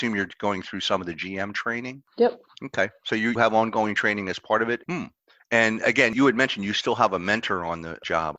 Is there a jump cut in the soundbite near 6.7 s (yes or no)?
no